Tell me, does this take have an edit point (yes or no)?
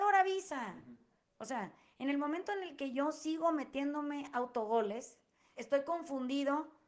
yes